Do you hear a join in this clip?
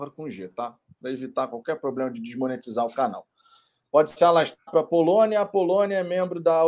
no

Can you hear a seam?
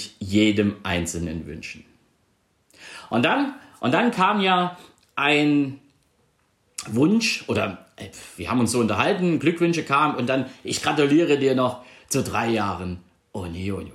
no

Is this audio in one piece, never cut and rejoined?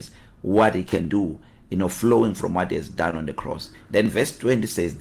yes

